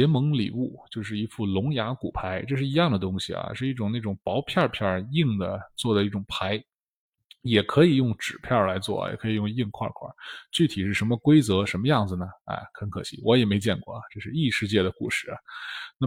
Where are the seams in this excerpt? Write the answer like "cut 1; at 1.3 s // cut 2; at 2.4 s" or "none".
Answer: none

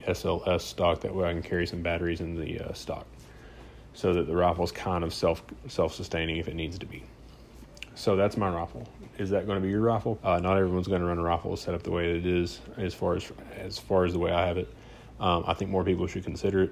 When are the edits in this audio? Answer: cut 1; at 10.2 s

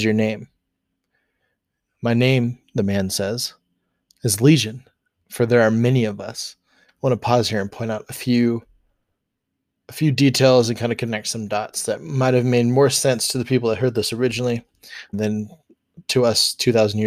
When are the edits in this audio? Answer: cut 1; at 6.9 s // cut 2; at 15.1 s

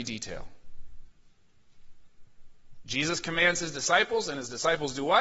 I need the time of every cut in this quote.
cut 1; at 2.8 s

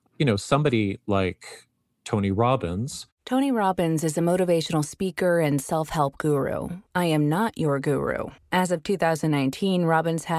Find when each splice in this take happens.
cut 1; at 6.9 s

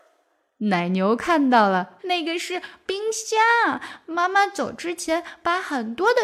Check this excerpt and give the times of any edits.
cut 1; at 2.0 s

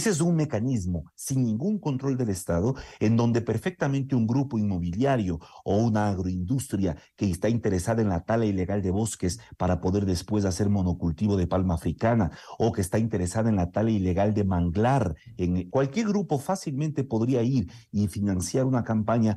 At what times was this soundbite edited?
cut 1; at 1.1 s // cut 2; at 15.7 s

